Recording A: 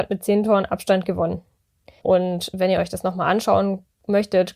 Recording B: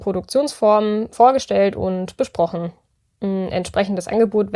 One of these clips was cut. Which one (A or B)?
A